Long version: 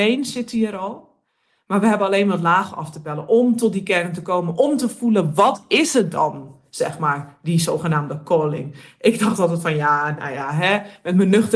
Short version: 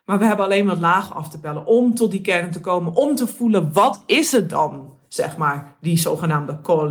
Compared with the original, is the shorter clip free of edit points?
yes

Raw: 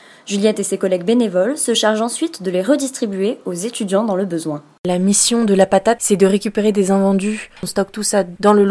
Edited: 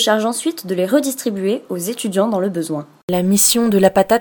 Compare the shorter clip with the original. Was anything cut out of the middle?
no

